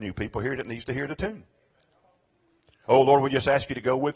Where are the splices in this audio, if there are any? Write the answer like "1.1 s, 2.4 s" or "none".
none